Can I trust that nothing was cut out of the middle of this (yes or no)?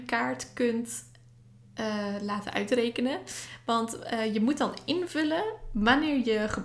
yes